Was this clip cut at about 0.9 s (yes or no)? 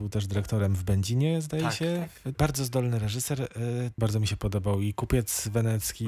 no